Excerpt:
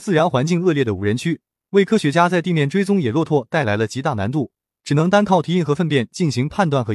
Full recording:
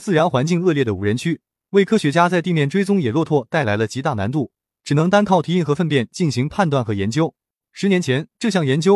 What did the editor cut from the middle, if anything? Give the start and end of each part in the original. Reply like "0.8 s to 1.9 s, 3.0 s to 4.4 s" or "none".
none